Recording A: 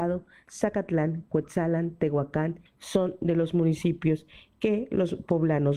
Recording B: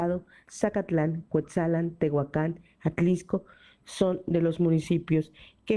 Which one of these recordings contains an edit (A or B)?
A